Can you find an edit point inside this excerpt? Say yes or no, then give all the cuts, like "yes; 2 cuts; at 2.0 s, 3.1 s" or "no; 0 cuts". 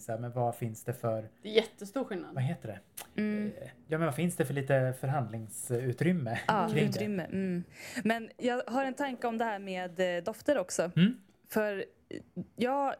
no; 0 cuts